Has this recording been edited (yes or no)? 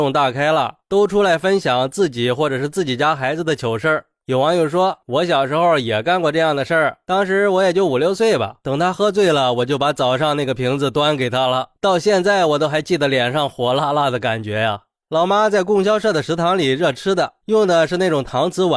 yes